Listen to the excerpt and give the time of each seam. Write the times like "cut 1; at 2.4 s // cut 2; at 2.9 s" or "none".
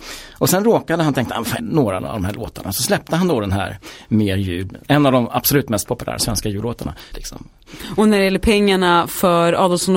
cut 1; at 1.6 s // cut 2; at 7.1 s